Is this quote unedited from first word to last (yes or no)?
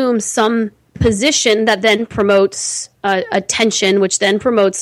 yes